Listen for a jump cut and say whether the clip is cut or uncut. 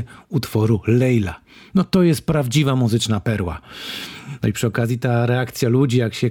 uncut